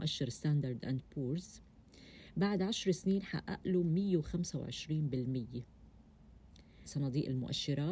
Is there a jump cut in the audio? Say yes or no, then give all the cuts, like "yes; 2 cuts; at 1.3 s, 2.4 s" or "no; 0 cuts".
yes; 1 cut; at 6.9 s